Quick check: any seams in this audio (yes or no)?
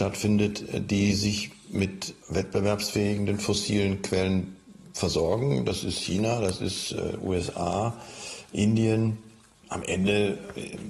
no